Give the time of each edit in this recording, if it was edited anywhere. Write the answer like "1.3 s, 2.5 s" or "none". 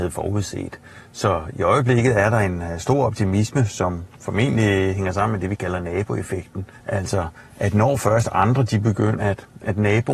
6.8 s, 9.2 s